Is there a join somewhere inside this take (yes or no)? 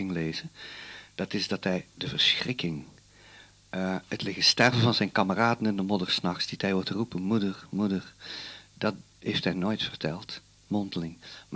no